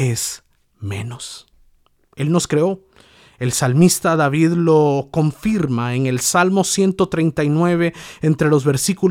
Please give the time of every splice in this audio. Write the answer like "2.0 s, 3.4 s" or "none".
2.1 s